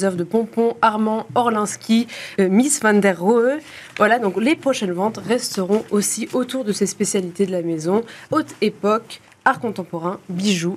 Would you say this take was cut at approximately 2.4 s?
yes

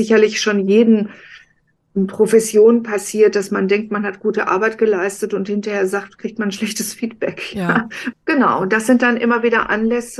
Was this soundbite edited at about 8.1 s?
yes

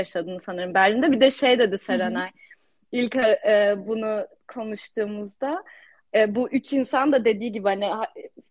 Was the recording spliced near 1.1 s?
no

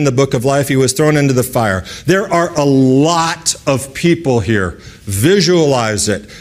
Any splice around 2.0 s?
no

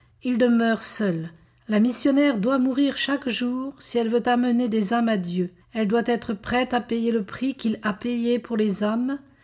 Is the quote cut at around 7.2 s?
no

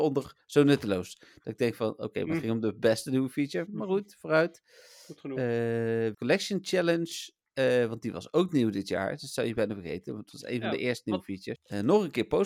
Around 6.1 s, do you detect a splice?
yes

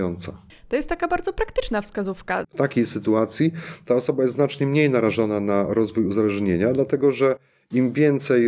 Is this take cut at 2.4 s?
yes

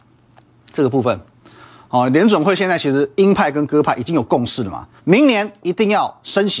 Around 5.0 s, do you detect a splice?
yes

